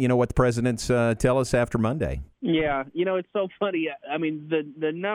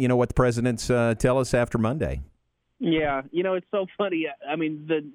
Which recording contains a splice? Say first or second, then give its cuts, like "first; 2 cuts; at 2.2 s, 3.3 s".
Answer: first; 1 cut; at 2.3 s